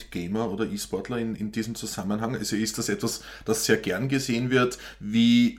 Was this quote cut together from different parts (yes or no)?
yes